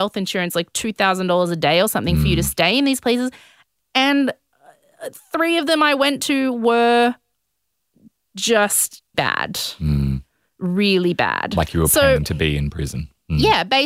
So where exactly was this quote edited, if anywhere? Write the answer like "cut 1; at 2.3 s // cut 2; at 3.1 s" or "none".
cut 1; at 9.1 s